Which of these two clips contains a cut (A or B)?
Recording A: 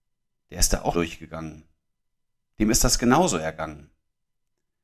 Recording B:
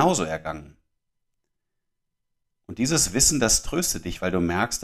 A